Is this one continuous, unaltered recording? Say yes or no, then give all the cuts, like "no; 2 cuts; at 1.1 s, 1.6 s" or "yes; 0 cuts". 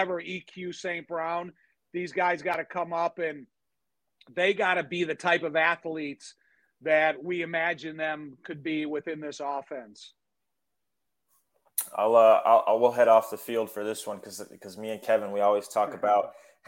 yes; 0 cuts